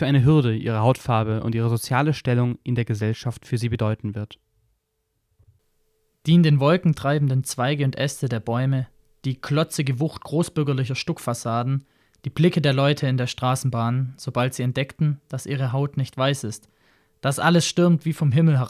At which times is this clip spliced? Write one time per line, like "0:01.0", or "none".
none